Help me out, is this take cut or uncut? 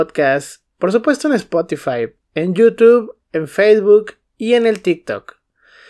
uncut